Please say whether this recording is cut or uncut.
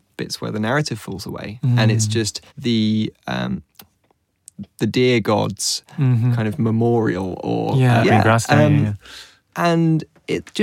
cut